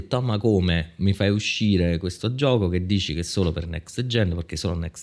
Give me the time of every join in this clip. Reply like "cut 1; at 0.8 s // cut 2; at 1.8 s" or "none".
none